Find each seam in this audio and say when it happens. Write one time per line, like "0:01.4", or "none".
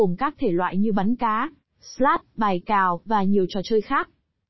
0:03.0